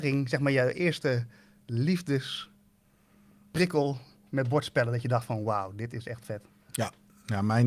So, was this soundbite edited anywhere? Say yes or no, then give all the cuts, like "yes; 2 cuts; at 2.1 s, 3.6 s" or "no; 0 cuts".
no; 0 cuts